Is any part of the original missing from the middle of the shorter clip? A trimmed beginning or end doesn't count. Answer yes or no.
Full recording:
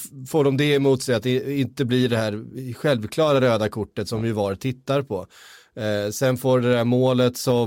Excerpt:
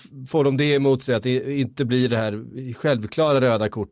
no